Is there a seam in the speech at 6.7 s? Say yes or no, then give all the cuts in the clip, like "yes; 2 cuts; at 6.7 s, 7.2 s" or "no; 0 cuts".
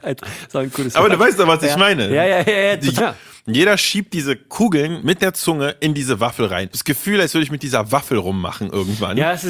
yes; 2 cuts; at 3.0 s, 6.7 s